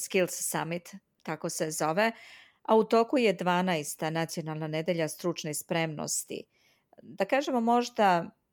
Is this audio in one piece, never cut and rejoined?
yes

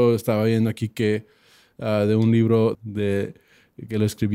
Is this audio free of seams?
no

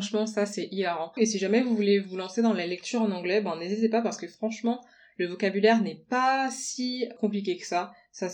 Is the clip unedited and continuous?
no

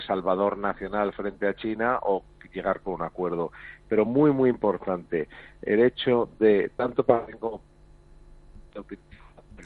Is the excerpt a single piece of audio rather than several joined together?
yes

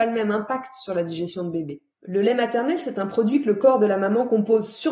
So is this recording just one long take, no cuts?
no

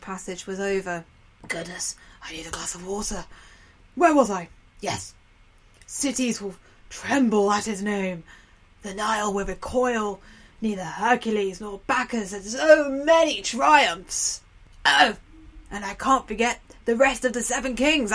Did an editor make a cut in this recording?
no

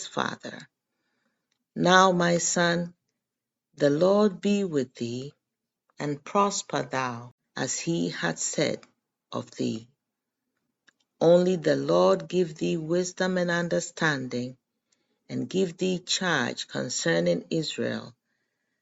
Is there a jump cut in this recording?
yes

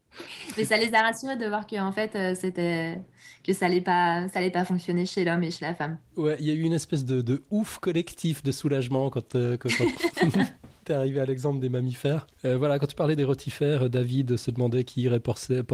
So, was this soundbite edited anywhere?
no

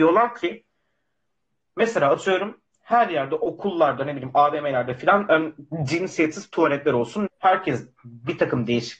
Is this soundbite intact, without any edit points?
no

